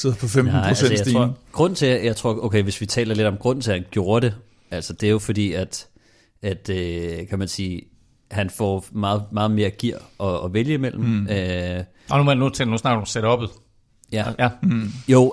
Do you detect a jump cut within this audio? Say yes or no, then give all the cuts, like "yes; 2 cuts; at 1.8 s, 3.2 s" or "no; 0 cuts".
no; 0 cuts